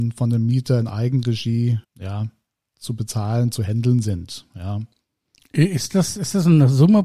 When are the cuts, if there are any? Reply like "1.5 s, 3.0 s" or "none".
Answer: 1.8 s